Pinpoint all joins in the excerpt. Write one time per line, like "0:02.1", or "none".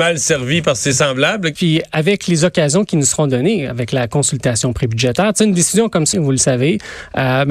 0:01.6
0:06.1